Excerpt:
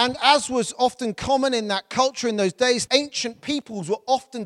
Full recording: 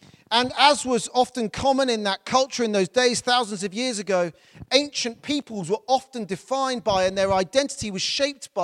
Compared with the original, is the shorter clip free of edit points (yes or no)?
no